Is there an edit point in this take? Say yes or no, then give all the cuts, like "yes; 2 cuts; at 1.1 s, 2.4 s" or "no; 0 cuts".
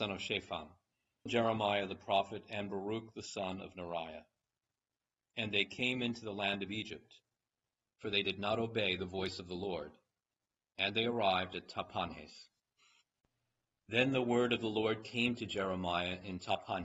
yes; 1 cut; at 1.3 s